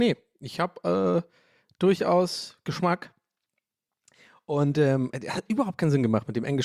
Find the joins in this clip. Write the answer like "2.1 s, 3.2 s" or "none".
none